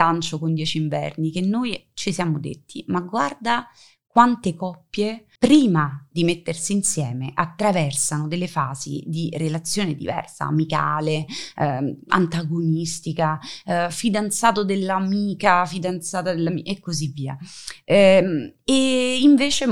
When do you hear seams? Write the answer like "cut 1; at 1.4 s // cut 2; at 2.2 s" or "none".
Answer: cut 1; at 5.4 s